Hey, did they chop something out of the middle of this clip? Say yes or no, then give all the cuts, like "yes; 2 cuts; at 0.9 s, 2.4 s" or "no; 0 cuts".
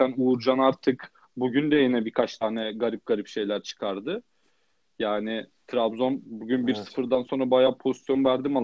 no; 0 cuts